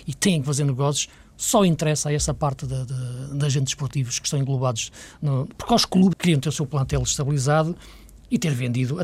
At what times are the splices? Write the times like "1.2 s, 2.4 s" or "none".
6.1 s